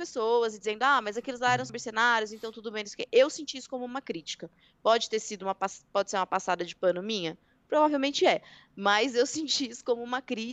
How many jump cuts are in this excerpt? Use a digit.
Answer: 0